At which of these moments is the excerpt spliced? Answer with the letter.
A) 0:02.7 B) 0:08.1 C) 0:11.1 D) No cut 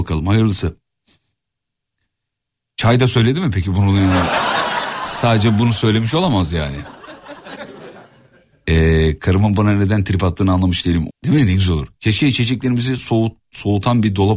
C